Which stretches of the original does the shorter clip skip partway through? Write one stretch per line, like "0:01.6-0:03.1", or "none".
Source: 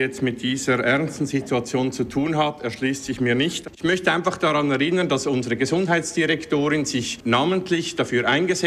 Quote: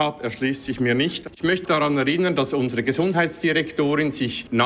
0:04.0-0:04.4